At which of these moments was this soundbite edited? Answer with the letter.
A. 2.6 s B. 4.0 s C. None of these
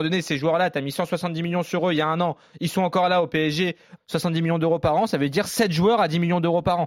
B